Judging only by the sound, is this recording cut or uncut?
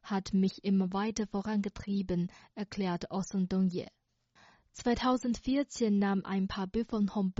cut